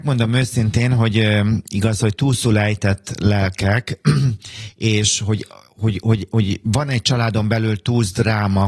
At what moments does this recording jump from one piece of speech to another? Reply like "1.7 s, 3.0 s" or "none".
none